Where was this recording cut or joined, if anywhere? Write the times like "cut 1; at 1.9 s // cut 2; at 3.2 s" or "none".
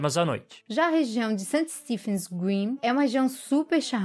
none